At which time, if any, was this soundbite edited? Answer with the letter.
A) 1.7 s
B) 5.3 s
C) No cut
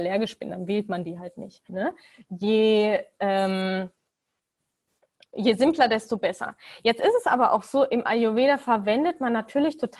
A